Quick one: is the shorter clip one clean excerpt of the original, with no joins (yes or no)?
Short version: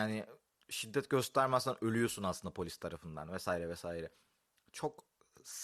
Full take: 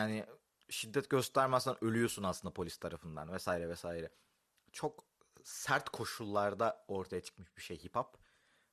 yes